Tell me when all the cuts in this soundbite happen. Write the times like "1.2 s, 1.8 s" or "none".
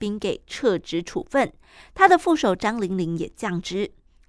none